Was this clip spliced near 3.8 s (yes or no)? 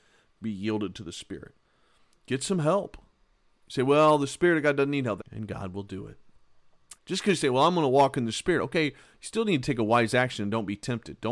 no